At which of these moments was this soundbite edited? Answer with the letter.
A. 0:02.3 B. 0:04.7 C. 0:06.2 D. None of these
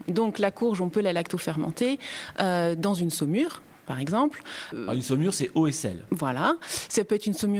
D